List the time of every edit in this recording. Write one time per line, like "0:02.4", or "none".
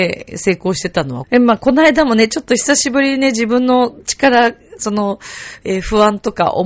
0:01.2